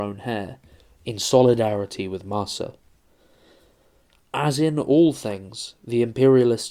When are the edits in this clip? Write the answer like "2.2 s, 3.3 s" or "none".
none